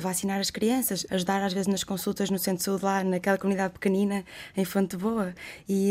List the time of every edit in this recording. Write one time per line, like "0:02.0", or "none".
0:01.1